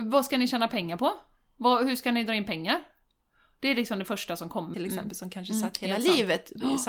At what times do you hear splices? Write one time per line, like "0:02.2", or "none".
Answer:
0:04.7